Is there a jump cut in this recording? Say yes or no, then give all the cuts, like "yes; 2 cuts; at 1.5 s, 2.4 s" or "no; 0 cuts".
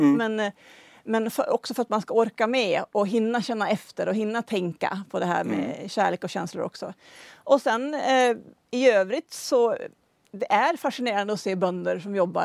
no; 0 cuts